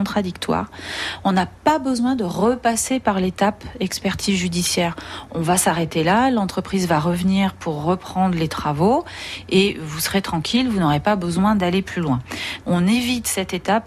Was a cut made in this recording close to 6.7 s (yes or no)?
no